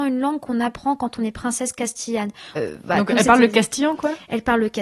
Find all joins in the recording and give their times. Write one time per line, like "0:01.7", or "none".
0:02.6